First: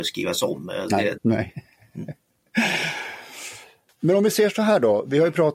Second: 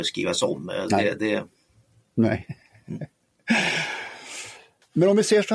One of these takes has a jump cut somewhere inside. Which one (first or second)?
first